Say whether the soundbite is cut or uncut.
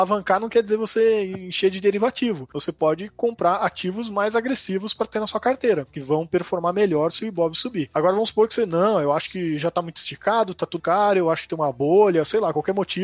cut